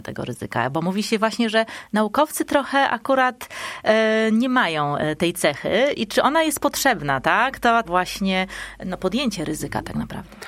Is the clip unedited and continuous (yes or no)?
no